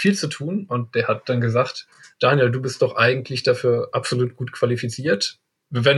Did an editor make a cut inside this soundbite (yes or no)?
no